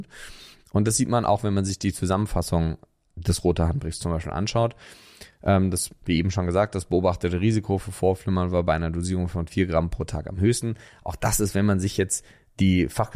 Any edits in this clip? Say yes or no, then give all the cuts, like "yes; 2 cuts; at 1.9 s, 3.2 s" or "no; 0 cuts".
no; 0 cuts